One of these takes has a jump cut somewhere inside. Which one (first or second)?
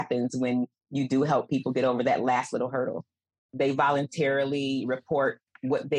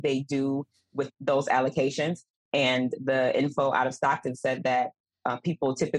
first